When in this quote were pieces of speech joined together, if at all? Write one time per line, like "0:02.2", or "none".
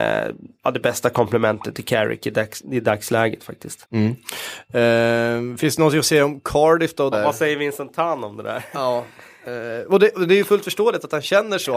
0:03.8
0:07.1